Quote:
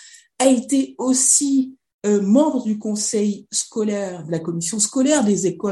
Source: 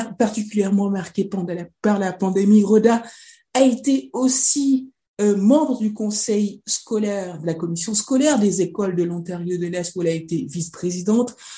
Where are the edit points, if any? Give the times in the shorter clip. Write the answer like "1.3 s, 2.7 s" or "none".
none

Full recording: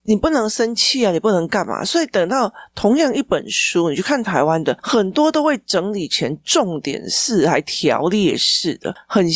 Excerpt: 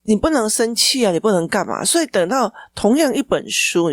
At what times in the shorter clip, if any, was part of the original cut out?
none

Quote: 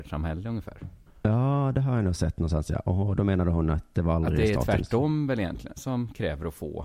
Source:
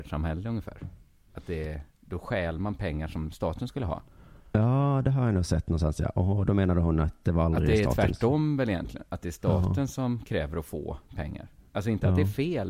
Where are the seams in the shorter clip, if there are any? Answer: 1.1 s, 5.8 s

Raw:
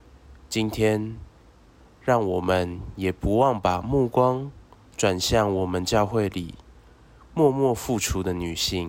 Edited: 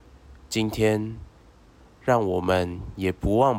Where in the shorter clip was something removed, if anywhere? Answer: none

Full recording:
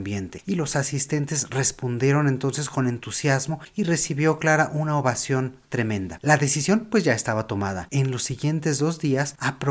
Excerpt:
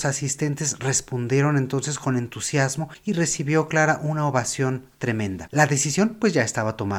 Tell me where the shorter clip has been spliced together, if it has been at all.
none

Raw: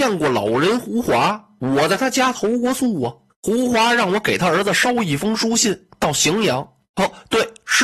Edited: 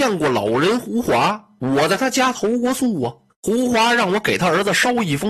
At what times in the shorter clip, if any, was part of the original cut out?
none

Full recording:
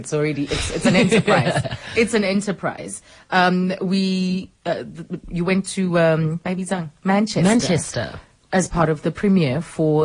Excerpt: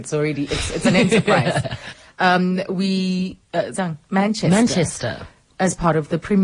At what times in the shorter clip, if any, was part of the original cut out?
1.9 s, 3.7 s

